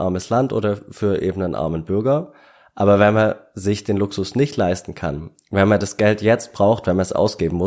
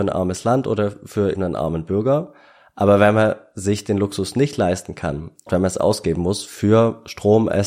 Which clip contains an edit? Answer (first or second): second